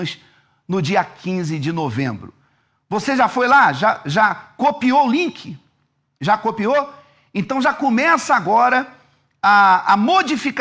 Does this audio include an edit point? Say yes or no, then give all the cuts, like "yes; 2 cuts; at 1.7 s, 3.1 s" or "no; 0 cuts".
no; 0 cuts